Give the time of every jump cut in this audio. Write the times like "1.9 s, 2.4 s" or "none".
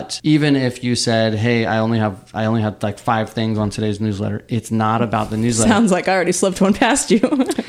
none